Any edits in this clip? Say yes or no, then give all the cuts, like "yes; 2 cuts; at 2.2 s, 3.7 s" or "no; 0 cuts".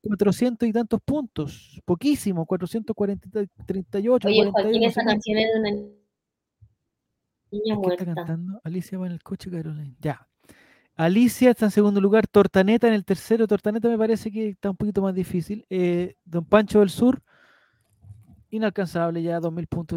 no; 0 cuts